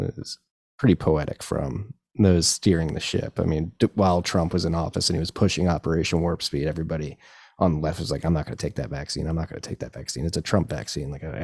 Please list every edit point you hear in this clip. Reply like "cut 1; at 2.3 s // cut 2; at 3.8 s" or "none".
none